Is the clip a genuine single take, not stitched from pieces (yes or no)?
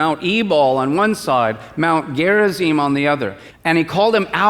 no